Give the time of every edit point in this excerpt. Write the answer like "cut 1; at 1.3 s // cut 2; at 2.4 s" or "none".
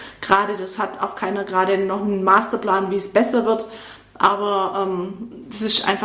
none